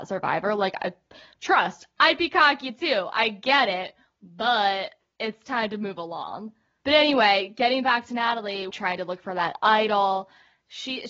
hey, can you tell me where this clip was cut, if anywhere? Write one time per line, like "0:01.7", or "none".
0:06.8
0:08.7